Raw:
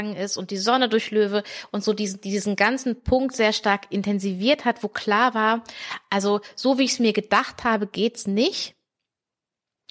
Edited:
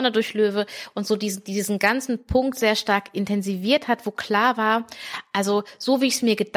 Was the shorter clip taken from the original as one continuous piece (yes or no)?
yes